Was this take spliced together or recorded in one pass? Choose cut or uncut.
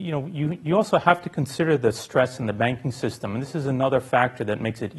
uncut